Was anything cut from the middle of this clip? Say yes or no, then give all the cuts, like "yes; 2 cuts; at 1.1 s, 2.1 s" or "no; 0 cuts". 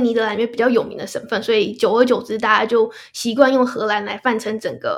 no; 0 cuts